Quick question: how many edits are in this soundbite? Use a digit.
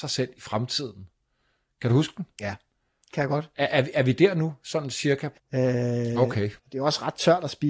2